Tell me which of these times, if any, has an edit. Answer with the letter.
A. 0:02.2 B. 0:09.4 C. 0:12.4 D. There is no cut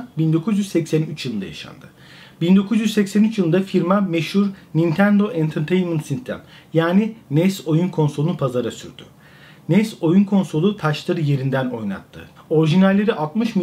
C